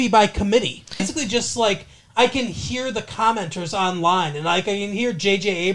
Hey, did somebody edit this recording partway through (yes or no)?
yes